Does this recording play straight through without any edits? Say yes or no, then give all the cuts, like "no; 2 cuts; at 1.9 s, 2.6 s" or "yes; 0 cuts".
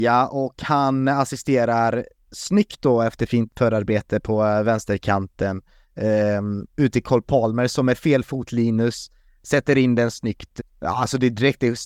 no; 1 cut; at 10.6 s